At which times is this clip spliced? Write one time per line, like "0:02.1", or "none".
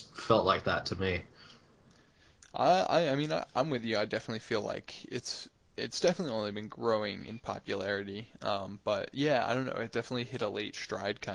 none